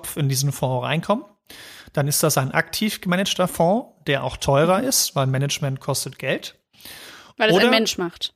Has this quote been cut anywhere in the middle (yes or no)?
no